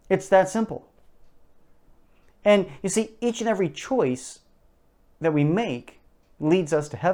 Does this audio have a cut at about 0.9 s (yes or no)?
no